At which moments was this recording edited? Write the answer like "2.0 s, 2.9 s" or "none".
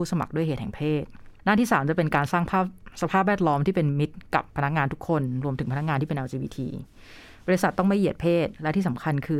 1.4 s